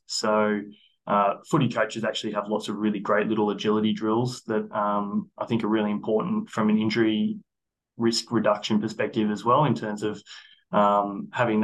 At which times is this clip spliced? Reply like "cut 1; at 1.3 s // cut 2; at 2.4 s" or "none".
none